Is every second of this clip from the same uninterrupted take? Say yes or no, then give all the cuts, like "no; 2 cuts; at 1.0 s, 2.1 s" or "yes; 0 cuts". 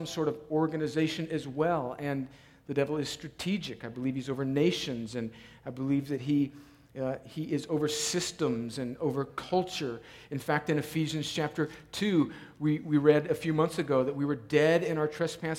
yes; 0 cuts